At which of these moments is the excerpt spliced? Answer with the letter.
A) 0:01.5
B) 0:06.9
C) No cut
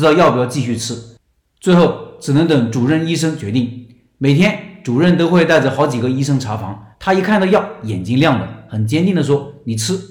B